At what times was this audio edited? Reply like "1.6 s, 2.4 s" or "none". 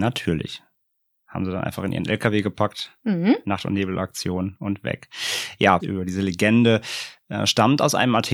5.8 s